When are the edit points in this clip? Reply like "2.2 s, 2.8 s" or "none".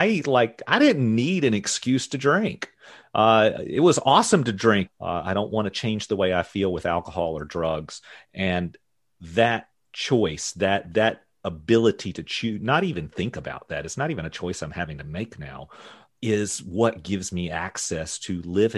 4.9 s